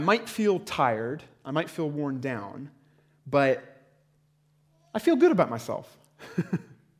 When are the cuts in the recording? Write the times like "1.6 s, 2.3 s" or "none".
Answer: none